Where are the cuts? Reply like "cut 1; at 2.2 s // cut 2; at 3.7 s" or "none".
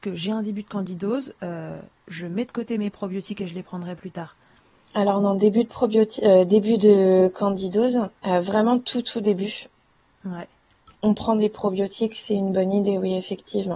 cut 1; at 8.2 s